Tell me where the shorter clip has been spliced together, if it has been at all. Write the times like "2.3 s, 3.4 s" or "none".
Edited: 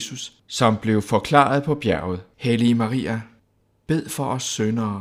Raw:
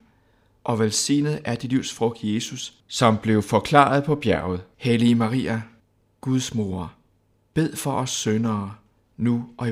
3.7 s